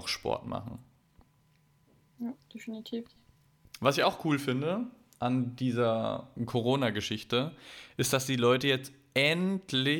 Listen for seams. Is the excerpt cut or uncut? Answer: uncut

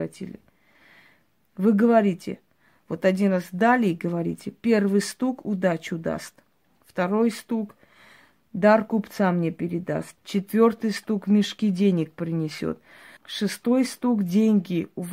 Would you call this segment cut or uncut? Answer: cut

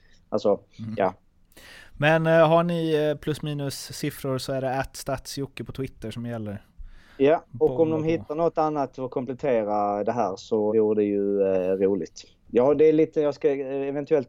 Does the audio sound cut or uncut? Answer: cut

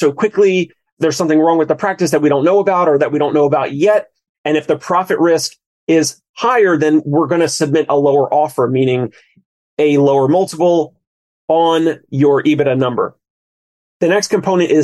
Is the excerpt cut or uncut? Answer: cut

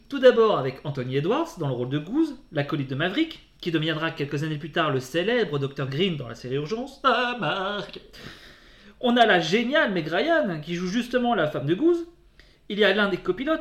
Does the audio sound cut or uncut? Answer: uncut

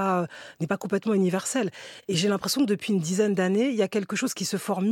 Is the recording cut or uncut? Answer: uncut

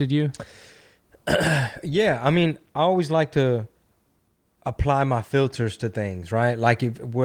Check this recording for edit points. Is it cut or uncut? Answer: uncut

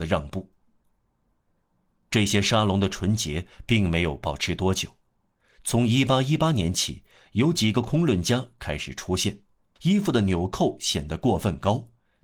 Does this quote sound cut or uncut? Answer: cut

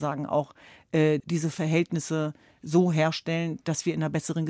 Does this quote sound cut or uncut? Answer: cut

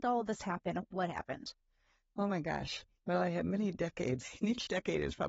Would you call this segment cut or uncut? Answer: cut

